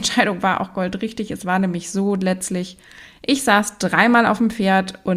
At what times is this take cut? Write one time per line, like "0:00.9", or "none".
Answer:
none